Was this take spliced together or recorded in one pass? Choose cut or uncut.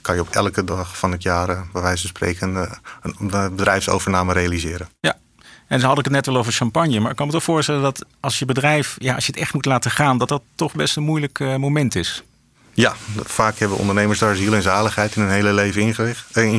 uncut